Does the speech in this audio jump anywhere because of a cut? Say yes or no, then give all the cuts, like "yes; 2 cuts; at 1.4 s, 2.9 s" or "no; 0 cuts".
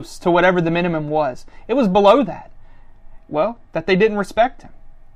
yes; 1 cut; at 3.2 s